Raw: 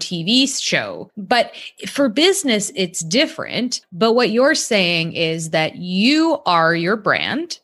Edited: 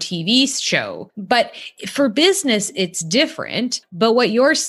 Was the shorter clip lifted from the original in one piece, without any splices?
yes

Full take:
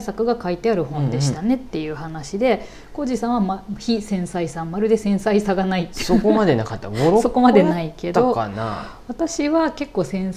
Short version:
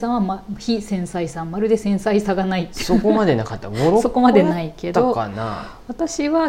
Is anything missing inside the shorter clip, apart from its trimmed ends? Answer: no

